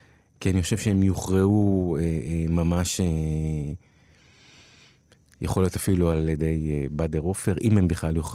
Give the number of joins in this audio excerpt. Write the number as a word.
zero